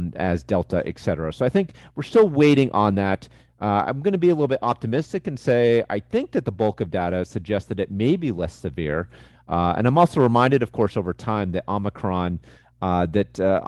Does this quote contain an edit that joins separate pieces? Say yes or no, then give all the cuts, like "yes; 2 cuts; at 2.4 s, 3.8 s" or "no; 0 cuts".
no; 0 cuts